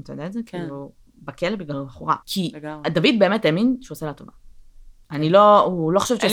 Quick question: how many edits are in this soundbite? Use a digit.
1